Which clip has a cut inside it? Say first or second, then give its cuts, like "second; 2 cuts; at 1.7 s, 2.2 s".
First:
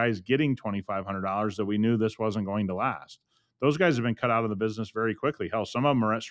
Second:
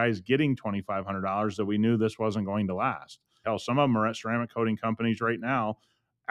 second; 1 cut; at 3.4 s